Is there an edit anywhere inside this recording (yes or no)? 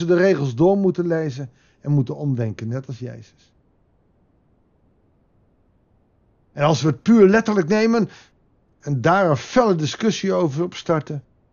no